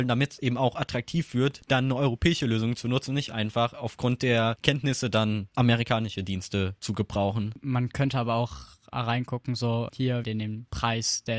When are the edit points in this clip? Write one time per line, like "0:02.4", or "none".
0:10.2